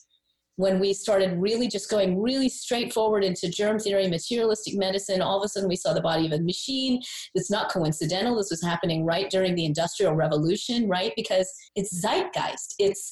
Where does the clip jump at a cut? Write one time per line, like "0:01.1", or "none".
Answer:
0:11.7